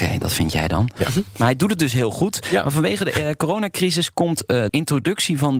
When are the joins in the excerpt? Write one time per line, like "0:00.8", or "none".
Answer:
0:04.7